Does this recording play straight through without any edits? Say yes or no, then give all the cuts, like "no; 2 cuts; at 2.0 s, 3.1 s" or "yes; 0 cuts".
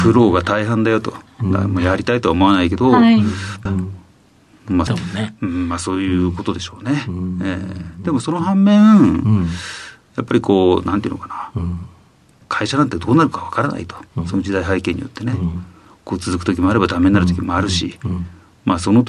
no; 3 cuts; at 3.7 s, 4.9 s, 12.4 s